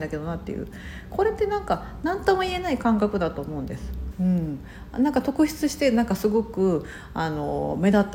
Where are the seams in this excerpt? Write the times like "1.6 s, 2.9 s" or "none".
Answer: 4.1 s